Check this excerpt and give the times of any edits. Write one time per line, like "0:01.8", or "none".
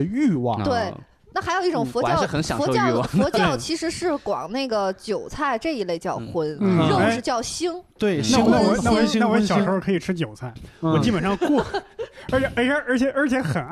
none

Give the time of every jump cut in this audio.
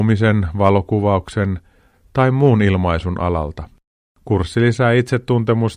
none

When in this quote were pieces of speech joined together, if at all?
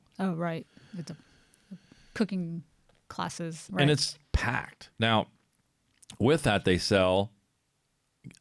0:03.7
0:04.9

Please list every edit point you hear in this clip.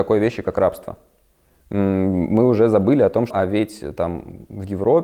0:03.3

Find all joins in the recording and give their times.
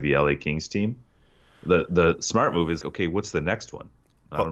0:02.8

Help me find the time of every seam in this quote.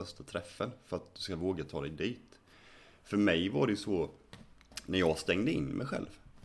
none

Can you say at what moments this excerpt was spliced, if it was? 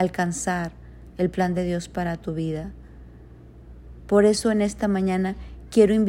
0:04.0

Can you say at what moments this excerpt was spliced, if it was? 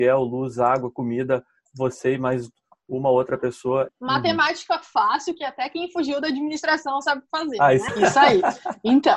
0:03.9
0:07.9

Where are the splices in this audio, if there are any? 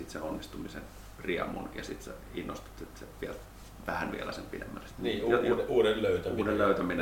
0:04.9

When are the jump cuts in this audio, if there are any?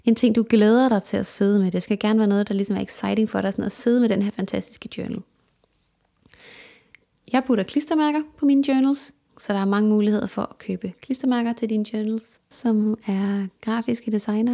0:09.3
0:12.5

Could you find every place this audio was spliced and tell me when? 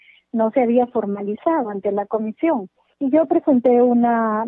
0:02.9

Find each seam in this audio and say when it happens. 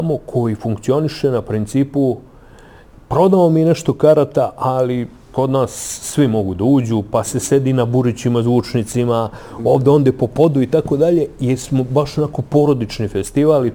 none

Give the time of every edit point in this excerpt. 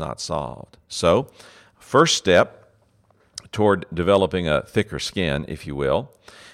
none

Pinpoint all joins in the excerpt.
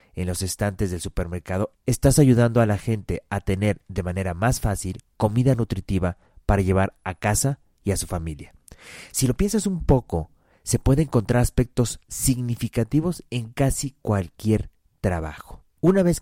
none

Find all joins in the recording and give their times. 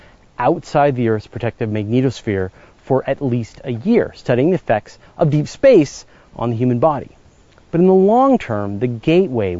none

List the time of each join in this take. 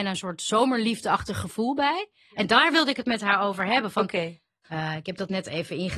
0:04.6

